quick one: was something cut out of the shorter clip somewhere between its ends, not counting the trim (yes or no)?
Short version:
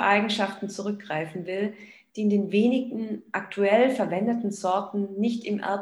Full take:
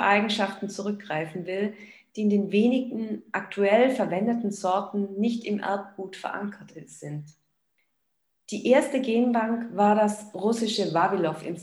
no